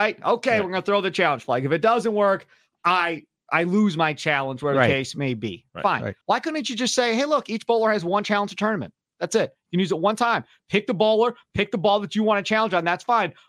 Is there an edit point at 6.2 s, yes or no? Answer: yes